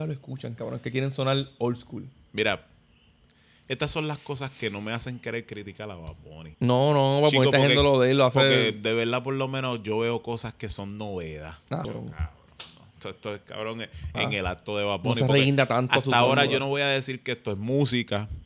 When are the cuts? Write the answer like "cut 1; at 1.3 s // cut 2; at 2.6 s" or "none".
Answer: cut 1; at 6.5 s // cut 2; at 11.8 s // cut 3; at 14.1 s